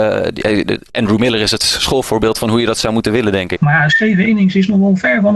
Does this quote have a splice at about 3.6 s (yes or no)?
yes